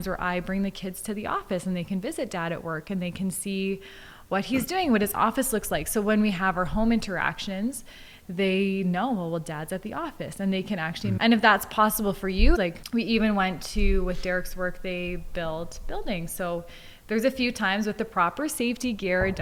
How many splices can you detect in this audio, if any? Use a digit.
2